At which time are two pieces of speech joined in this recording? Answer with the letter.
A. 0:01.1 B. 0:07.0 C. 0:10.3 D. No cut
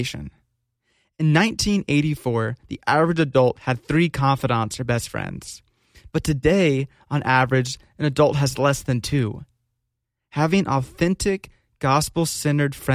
D